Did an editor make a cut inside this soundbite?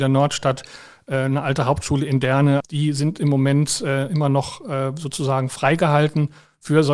yes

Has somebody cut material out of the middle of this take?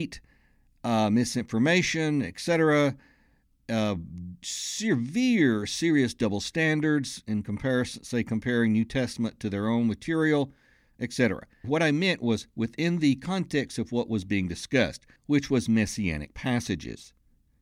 yes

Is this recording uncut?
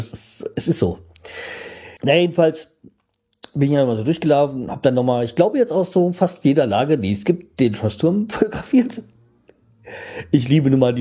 no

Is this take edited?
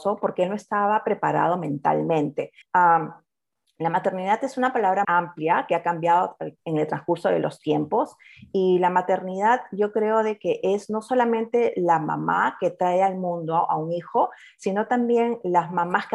yes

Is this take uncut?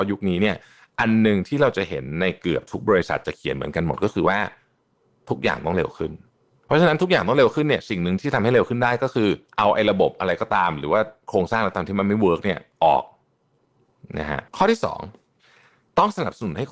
no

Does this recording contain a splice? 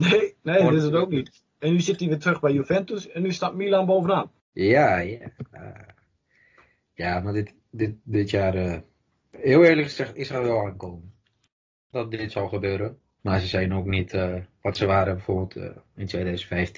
yes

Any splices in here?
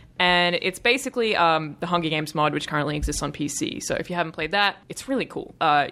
yes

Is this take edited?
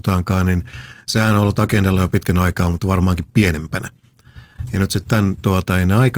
no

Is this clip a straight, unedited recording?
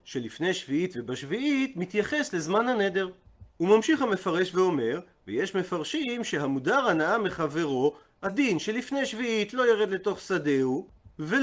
yes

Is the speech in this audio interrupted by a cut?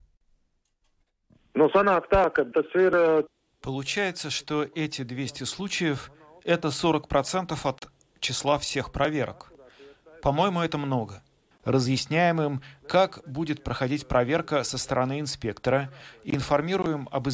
yes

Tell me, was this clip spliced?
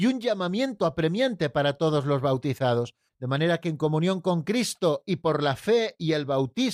yes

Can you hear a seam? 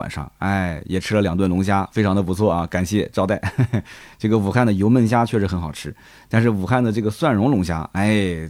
no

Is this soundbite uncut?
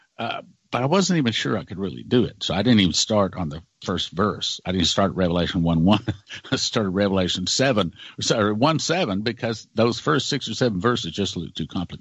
yes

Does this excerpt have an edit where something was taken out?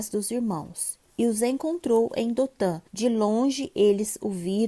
yes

